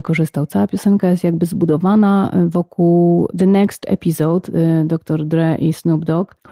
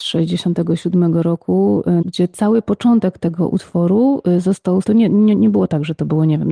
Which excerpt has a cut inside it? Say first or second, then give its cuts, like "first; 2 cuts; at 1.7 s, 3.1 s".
second; 2 cuts; at 2.0 s, 4.8 s